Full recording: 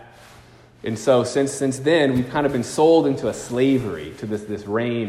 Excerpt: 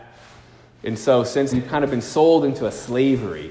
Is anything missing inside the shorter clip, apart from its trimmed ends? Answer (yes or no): yes